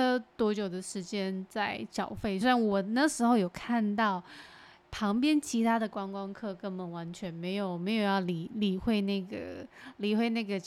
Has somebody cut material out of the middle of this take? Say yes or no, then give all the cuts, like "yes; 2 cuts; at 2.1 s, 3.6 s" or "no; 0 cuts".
no; 0 cuts